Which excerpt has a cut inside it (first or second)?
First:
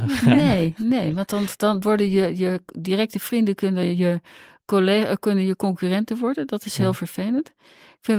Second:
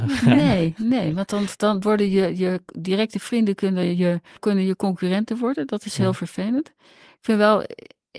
second